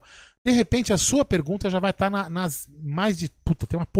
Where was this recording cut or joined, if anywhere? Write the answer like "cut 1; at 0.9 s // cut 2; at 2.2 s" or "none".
none